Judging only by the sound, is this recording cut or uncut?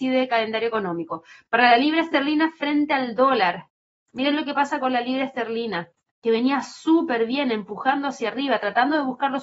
uncut